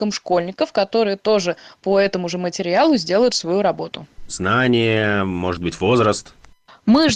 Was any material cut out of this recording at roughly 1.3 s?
no; 1 cut; at 4.3 s

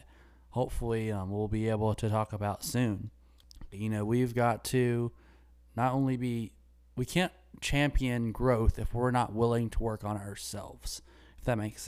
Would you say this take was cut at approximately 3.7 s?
yes; 1 cut; at 3.7 s

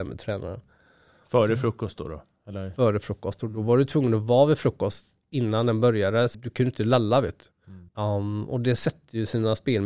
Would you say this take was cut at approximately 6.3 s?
yes; 2 cuts; at 6.3 s, 7.9 s

